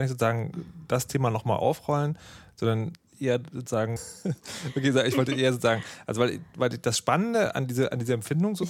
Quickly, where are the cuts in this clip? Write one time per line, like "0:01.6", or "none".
0:04.0